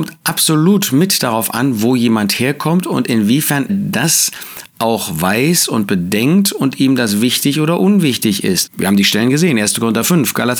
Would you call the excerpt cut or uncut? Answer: cut